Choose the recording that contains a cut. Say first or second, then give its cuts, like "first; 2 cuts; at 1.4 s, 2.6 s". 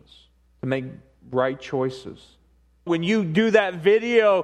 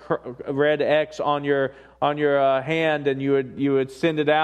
first; 1 cut; at 2.9 s